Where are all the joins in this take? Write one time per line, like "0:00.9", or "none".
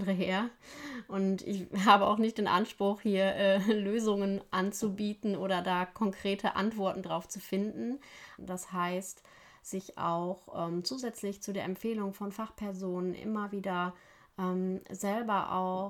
0:08.4